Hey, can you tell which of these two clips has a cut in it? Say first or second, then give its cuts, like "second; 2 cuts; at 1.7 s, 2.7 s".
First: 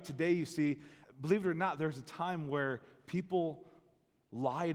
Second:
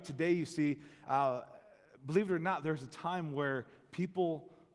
first; 1 cut; at 1.0 s